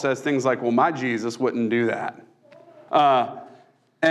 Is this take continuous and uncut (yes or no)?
no